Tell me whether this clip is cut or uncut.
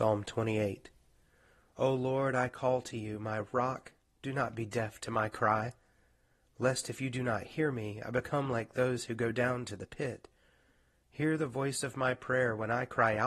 uncut